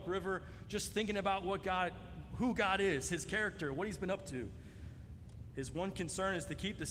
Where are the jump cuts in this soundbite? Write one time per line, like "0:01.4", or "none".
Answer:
0:05.5

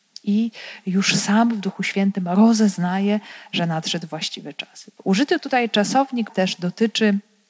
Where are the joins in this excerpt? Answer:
0:05.0
0:06.3

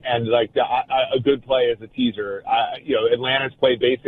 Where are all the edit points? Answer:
none

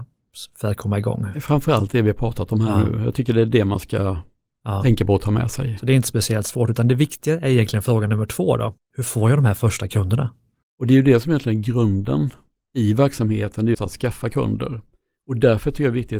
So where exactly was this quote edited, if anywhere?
0:13.7

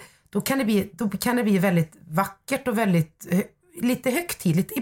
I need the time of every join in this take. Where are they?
none

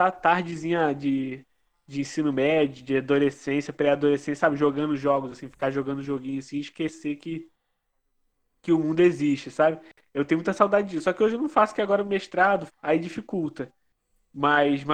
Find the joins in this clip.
0:12.7

